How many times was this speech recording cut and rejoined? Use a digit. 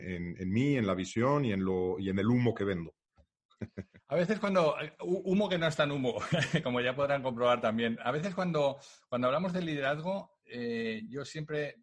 0